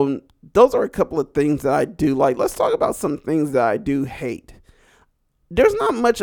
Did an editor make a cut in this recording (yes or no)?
no